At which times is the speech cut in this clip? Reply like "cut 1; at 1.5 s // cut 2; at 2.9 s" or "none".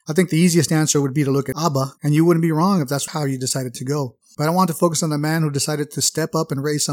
cut 1; at 1.9 s